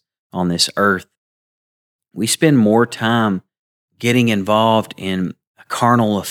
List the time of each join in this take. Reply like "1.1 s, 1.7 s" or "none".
none